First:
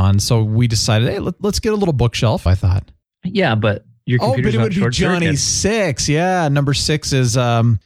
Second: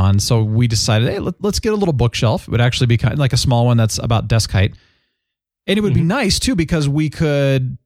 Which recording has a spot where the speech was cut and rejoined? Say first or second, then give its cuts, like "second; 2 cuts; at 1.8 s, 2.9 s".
first; 1 cut; at 2.5 s